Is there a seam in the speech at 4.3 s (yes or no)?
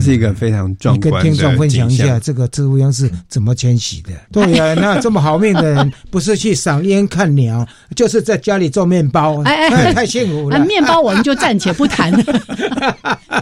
yes